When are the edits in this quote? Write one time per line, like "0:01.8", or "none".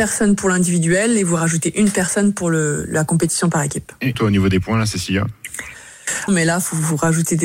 0:04.1
0:06.3